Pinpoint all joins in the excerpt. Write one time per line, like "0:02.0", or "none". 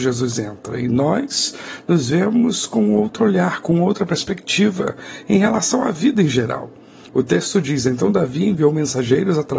0:07.1